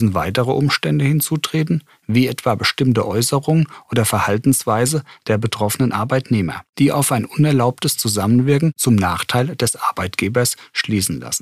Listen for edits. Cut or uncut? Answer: uncut